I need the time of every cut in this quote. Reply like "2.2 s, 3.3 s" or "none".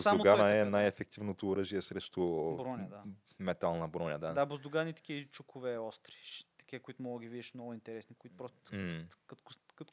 8.2 s